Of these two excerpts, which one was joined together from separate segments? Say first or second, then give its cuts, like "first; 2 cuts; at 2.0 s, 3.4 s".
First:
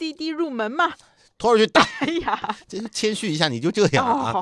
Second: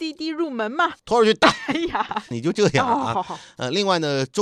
second; 2 cuts; at 1.0 s, 2.3 s